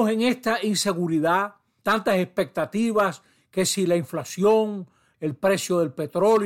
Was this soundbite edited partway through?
yes; 2 cuts; at 1.8 s, 5.1 s

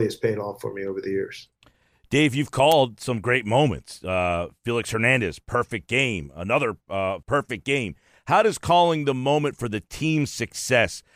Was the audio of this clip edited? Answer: yes; 1 cut; at 7.2 s

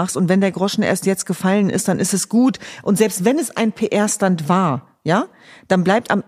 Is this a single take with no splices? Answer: yes; 0 cuts

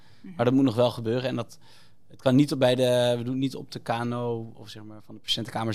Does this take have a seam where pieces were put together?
no; 0 cuts

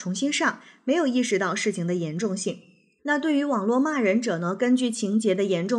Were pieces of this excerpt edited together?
yes; 1 cut; at 3.0 s

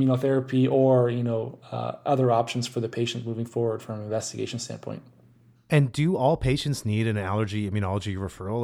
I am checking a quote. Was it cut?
no; 0 cuts

